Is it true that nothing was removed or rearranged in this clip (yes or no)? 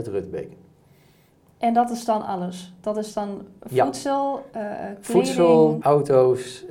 no